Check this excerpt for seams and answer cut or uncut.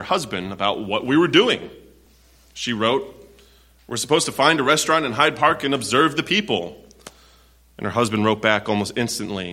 uncut